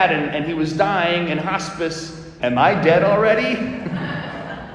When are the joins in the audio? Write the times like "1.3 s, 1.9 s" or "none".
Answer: 2.4 s